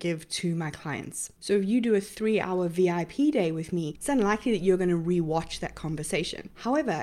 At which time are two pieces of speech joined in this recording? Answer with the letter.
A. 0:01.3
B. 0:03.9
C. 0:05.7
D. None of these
B